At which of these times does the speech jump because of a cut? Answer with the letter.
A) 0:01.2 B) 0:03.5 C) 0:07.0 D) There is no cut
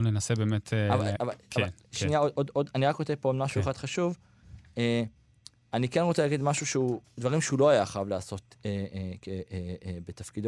A